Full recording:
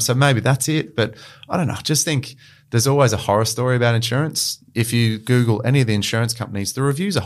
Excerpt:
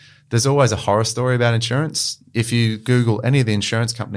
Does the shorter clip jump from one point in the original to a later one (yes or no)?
no